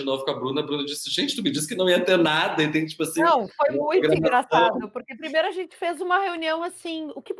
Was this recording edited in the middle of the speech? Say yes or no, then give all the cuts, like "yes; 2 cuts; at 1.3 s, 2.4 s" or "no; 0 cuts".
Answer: no; 0 cuts